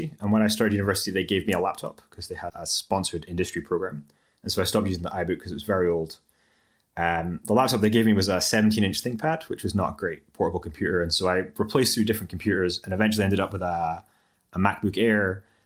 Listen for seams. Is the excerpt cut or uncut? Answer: cut